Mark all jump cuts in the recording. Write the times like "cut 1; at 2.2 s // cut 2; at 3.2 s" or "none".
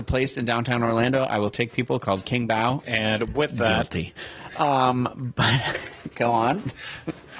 cut 1; at 2.8 s